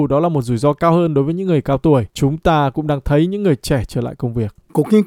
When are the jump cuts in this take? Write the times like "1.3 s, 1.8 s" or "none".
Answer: 2.1 s